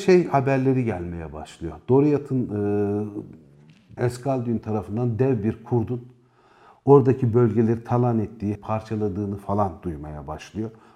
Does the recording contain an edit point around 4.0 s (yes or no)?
yes